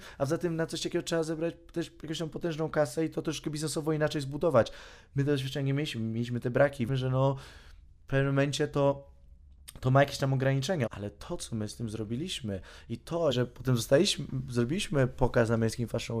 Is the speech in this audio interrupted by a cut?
yes; 3 cuts; at 6.9 s, 10.9 s, 13.3 s

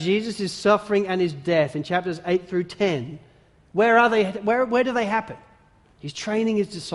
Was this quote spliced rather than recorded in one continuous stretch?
yes; 1 cut; at 5.9 s

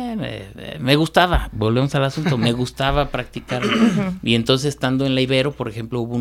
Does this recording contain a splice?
no; 0 cuts

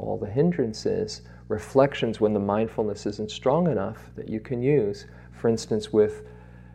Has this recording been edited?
no; 0 cuts

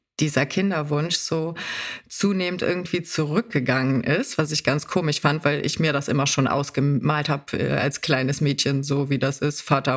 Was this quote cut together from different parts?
no; 0 cuts

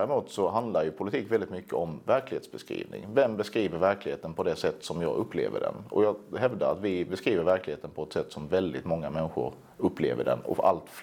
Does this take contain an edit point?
no; 0 cuts

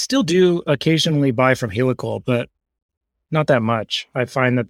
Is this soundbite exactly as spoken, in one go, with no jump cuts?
yes; 0 cuts

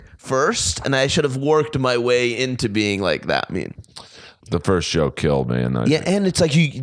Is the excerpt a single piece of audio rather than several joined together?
no; 1 cut; at 4.4 s

